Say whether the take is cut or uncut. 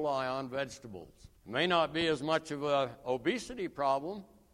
cut